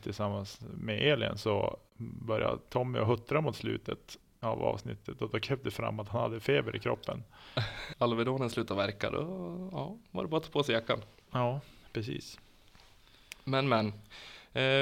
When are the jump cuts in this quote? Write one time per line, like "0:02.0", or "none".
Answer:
0:07.9